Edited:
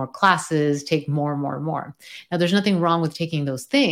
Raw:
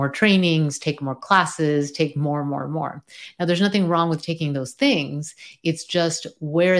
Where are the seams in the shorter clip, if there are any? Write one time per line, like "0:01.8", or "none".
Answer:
none

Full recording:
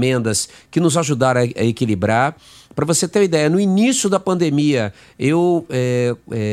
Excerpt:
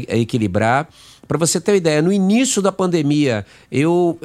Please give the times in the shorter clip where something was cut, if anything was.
none

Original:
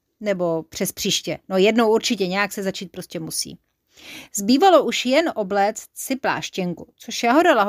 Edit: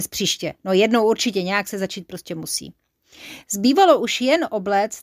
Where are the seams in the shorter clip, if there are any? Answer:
none

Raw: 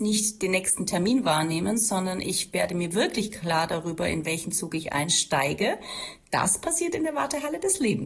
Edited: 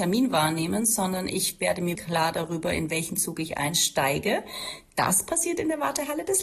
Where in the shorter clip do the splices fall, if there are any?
0:02.0

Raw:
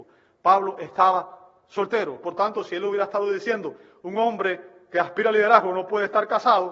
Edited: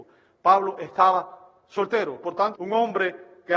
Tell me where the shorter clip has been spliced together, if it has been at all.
0:02.5

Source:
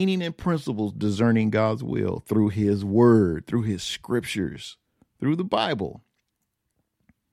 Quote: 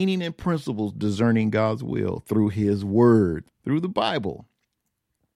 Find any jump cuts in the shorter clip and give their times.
0:03.4

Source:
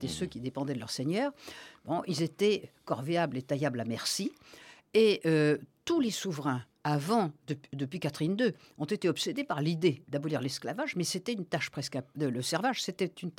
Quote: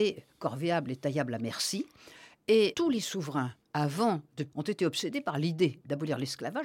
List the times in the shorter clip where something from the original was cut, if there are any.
0:02.7
0:04.5

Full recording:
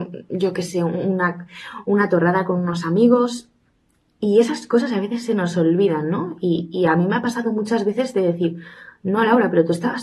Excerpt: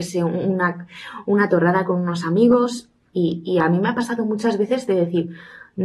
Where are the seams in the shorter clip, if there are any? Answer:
0:03.1

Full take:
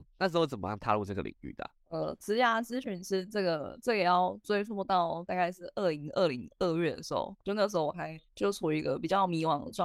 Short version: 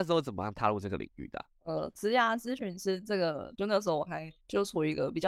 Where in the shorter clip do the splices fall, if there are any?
0:03.6

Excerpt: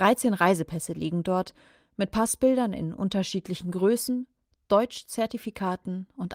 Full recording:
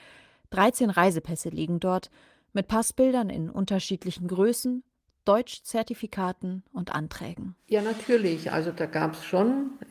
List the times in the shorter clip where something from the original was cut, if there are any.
none

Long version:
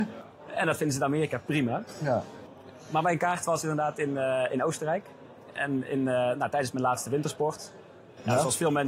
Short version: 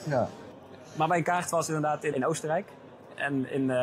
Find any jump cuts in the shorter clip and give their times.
0:02.1

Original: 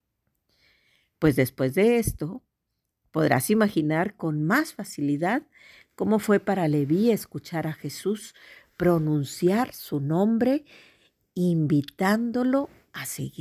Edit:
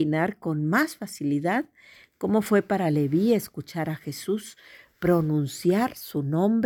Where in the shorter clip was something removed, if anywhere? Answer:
none

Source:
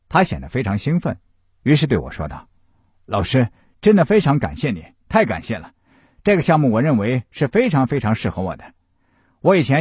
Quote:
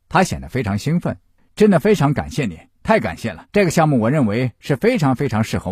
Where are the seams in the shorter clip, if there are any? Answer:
0:01.4
0:03.5

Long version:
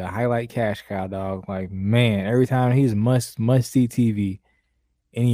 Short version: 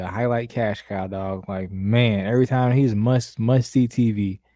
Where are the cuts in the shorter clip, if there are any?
none

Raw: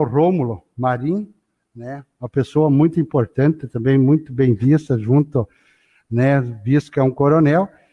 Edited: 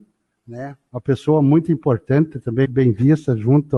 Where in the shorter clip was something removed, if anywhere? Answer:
0:02.6

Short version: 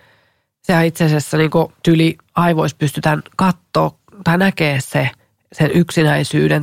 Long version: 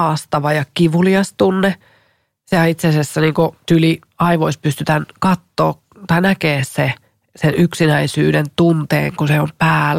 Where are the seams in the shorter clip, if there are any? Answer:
none

